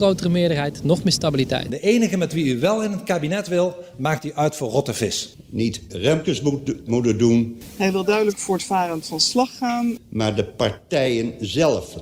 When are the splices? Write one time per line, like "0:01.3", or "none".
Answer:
0:06.9